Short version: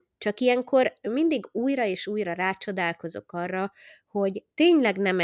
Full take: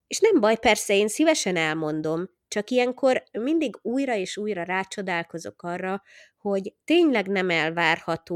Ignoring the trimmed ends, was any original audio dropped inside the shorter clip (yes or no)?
no